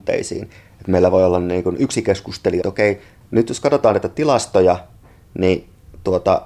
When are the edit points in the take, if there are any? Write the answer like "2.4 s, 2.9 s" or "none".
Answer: 2.6 s